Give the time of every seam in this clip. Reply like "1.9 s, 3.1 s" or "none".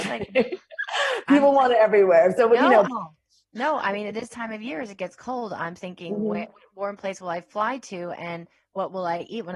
2.8 s